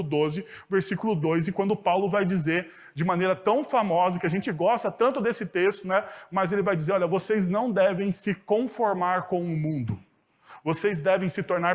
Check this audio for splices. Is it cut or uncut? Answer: uncut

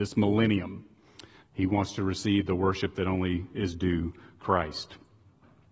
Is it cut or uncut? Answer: cut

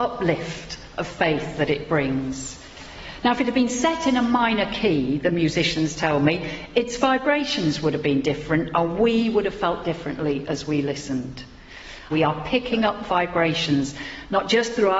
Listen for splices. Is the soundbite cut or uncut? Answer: cut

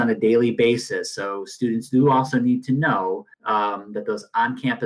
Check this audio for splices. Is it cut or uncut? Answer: cut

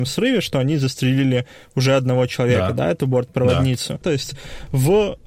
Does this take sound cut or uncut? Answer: cut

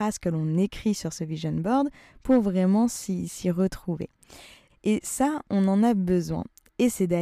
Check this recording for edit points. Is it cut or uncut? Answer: cut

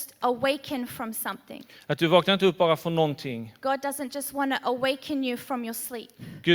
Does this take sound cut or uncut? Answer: uncut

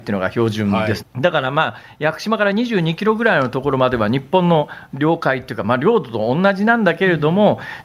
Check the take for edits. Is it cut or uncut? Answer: cut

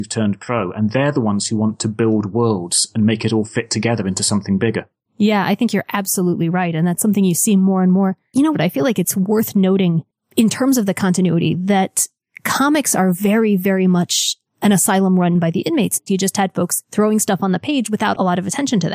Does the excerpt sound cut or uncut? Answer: cut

